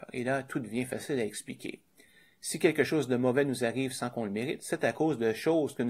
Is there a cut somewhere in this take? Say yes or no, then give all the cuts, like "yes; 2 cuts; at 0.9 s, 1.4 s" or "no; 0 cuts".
no; 0 cuts